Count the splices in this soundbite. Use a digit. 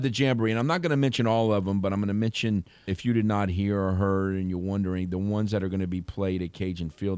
1